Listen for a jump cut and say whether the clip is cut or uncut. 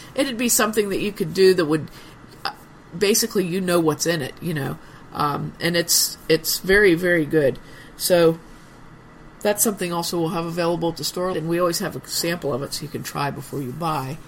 cut